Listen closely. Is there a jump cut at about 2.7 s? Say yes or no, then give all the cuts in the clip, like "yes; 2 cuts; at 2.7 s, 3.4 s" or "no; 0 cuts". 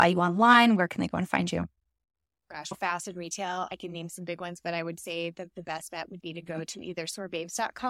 yes; 2 cuts; at 2.7 s, 6.2 s